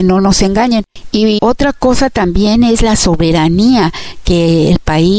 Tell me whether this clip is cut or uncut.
cut